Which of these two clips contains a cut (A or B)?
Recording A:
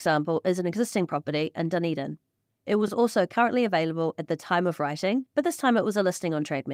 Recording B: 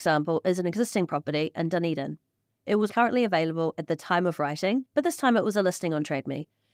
B